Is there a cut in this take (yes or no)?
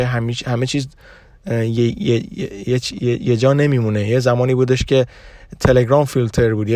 no